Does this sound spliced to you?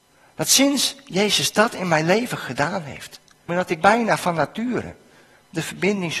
yes; 1 cut; at 3.5 s

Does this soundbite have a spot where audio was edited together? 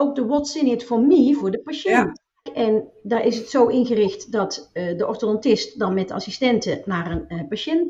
yes; 1 cut; at 2.5 s

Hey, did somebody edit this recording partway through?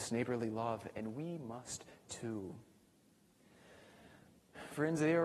no; 0 cuts

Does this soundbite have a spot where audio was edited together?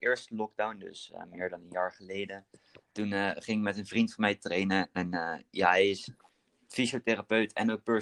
no; 0 cuts

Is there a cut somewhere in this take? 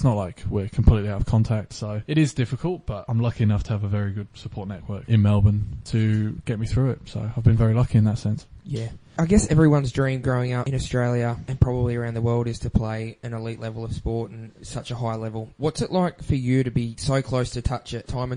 no; 0 cuts

